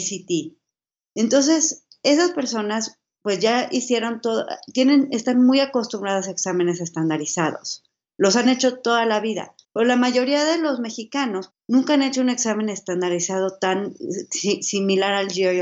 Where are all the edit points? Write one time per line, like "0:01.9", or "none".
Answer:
0:09.6
0:11.5